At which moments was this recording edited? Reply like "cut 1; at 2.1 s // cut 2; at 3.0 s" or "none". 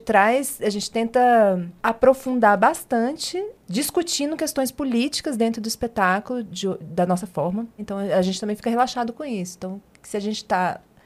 cut 1; at 7.8 s